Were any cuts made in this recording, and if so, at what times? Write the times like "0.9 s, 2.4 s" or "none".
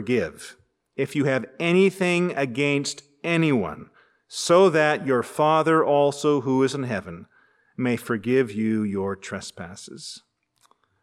none